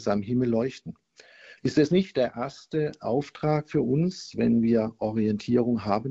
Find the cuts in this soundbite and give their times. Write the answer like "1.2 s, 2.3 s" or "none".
1.6 s